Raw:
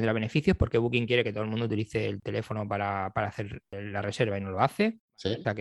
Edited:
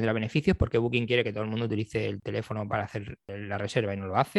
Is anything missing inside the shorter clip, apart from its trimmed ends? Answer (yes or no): yes